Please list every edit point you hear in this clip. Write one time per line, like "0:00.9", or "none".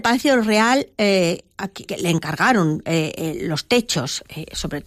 0:01.9